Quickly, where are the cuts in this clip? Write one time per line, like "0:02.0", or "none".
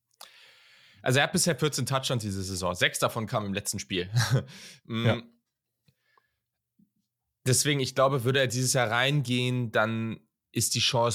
none

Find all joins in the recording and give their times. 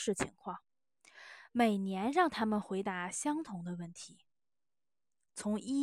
none

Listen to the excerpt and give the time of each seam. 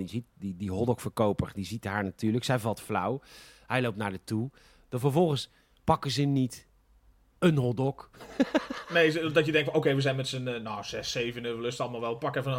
none

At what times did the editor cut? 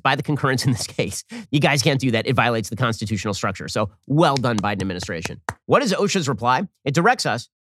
0:01.5
0:05.6

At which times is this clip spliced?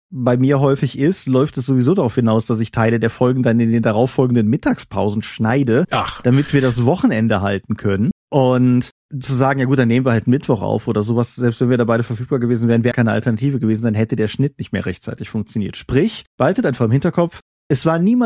0:12.9

